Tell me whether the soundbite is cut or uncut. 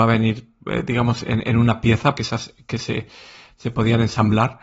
cut